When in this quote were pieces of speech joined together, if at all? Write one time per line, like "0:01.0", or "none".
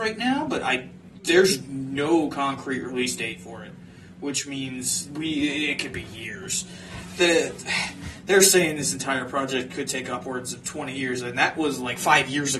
none

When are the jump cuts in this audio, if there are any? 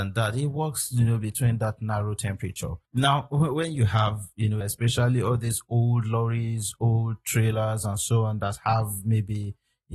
0:02.9
0:04.6

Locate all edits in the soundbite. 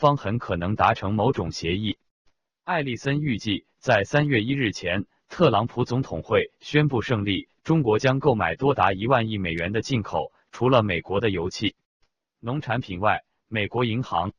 none

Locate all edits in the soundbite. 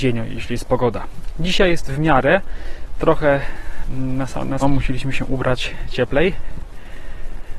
0:04.6

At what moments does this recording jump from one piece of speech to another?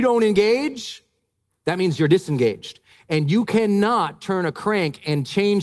none

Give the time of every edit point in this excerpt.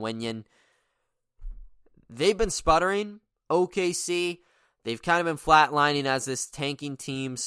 none

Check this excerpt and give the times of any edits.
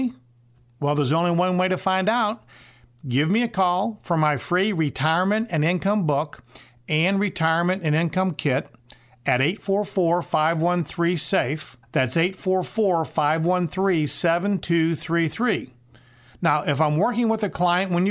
0:11.8

